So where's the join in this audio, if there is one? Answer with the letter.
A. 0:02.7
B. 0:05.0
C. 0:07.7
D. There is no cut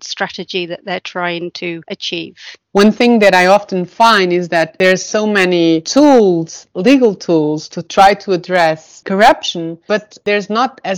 A